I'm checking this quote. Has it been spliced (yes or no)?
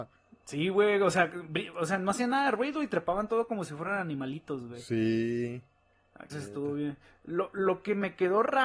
yes